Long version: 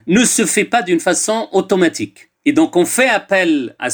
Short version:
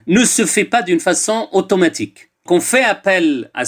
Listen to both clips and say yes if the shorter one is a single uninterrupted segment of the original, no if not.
no